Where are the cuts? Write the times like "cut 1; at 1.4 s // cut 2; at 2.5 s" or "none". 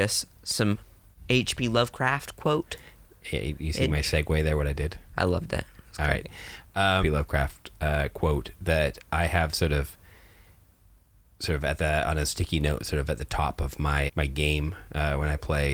cut 1; at 7.0 s // cut 2; at 14.1 s